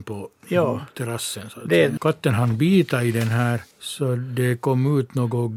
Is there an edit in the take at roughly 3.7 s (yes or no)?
yes